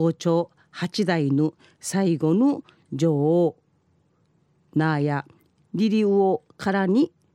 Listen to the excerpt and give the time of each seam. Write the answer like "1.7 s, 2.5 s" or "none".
none